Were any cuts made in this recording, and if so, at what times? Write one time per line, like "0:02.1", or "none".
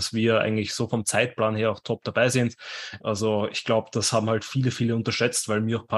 0:03.0